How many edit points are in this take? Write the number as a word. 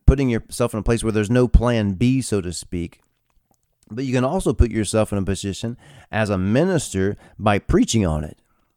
zero